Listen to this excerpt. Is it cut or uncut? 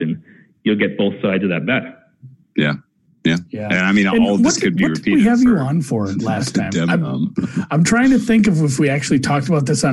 uncut